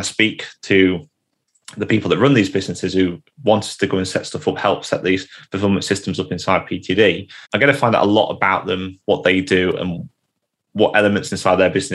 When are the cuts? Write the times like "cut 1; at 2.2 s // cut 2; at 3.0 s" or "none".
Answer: cut 1; at 7.4 s